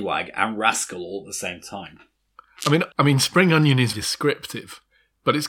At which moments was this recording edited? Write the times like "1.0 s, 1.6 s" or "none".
2.9 s, 3.9 s

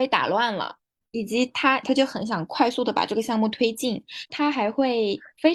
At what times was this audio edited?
1.8 s, 4.3 s

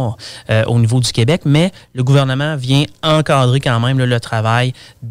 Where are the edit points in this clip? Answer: none

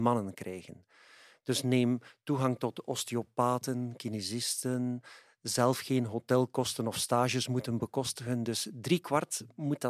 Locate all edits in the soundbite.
none

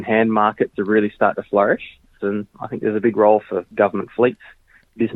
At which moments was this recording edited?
2.2 s

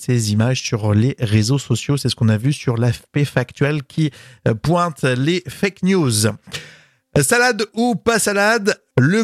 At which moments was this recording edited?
none

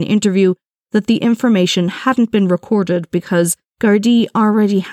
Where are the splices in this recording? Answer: 3.7 s

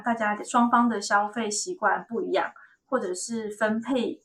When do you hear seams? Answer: none

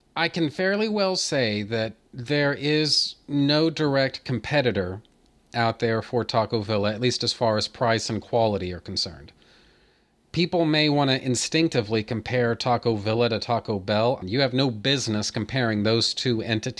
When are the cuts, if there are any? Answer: 14.2 s

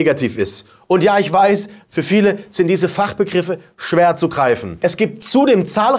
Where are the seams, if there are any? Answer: 4.8 s

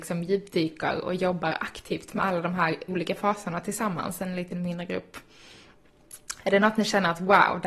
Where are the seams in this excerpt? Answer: 2.9 s

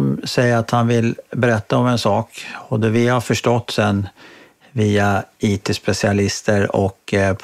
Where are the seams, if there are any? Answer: none

